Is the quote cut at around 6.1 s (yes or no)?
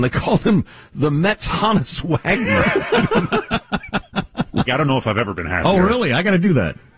no